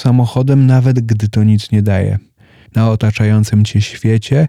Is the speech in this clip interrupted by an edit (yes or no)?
yes